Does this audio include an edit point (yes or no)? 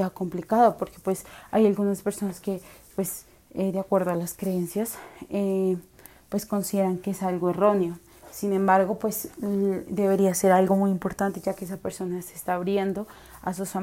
no